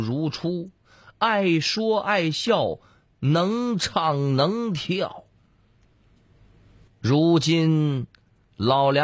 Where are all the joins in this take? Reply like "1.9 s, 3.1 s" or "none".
6.9 s